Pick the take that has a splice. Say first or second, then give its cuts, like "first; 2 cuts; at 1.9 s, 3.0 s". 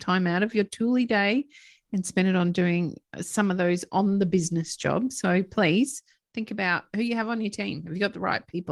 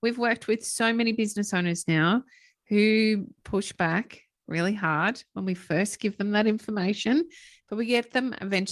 second; 1 cut; at 3.4 s